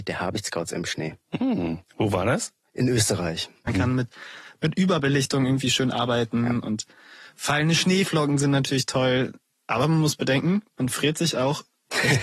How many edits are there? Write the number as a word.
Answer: one